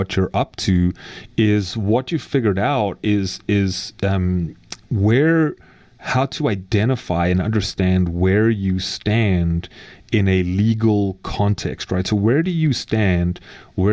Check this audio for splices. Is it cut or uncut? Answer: uncut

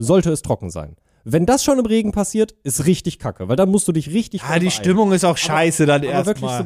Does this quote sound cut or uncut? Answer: uncut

